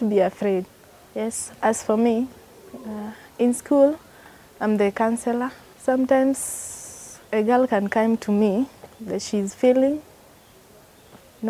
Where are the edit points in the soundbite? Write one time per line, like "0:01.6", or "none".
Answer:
0:05.7
0:07.3